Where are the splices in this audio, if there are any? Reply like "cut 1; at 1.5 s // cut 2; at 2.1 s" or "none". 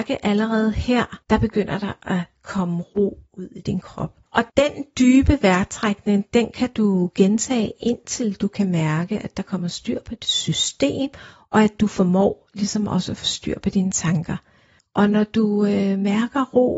cut 1; at 4.3 s